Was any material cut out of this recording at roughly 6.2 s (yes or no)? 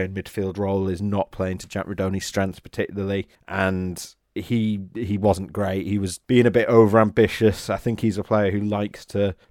yes